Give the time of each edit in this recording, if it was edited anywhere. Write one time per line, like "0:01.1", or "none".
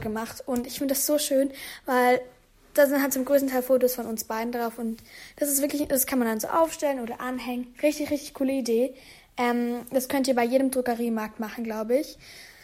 none